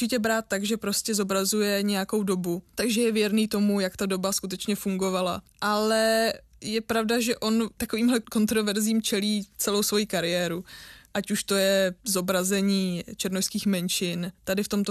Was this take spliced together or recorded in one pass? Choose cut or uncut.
uncut